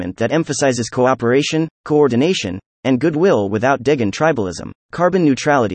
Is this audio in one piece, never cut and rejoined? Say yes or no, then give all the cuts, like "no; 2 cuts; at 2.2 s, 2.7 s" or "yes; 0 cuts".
no; 1 cut; at 4.8 s